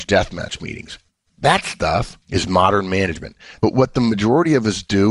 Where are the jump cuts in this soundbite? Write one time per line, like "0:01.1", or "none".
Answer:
0:02.2
0:03.6